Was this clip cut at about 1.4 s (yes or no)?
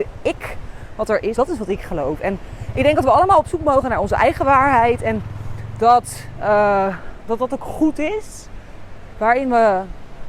yes